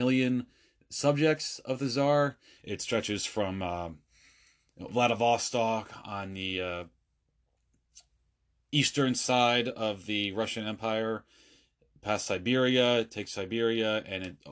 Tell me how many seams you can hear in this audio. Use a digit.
1